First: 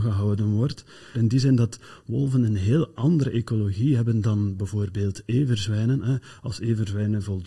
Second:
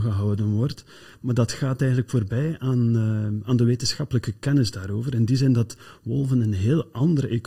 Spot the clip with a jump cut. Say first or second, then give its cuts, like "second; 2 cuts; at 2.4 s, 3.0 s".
first; 1 cut; at 1.1 s